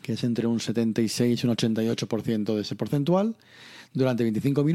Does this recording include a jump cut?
no; 0 cuts

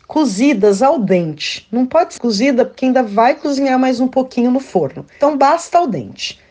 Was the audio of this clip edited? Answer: yes; 1 cut; at 2.2 s

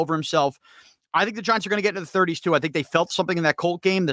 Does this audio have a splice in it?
no; 0 cuts

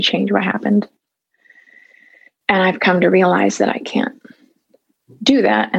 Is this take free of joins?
yes; 0 cuts

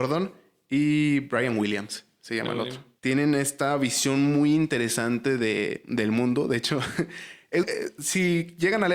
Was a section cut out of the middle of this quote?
yes; 2 cuts; at 3.0 s, 7.6 s

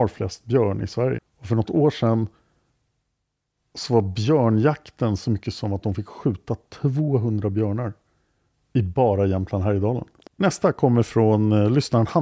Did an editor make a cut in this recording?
yes; 2 cuts; at 1.2 s, 10.3 s

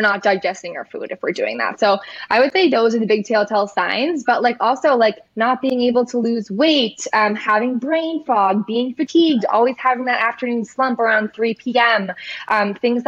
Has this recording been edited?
yes; 1 cut; at 5.3 s

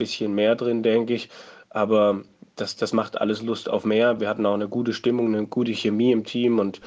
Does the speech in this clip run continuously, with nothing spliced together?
yes; 0 cuts

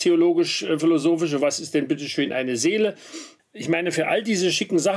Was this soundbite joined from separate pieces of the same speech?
yes; 1 cut; at 3.4 s

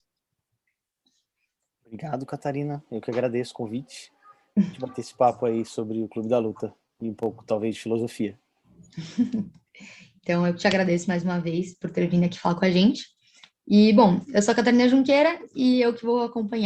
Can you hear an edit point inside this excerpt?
no; 0 cuts

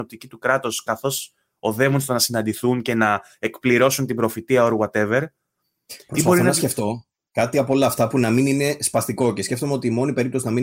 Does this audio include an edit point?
no; 0 cuts

